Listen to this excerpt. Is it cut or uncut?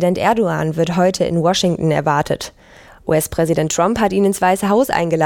uncut